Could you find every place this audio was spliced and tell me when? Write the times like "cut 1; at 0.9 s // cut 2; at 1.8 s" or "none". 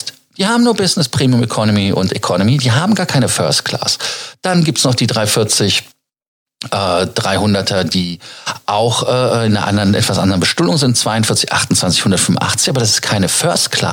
none